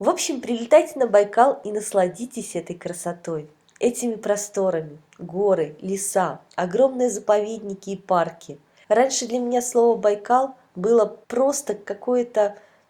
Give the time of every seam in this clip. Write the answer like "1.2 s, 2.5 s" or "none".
8.8 s, 11.2 s